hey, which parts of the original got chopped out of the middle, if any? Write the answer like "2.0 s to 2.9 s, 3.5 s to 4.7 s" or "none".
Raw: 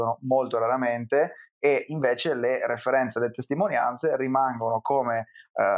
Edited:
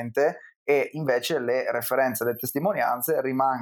none